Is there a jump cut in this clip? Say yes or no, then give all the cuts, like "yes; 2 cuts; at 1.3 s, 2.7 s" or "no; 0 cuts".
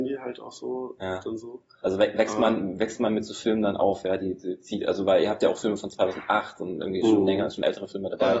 no; 0 cuts